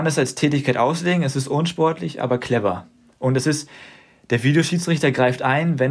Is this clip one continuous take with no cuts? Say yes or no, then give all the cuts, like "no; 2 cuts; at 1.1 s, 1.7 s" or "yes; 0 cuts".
yes; 0 cuts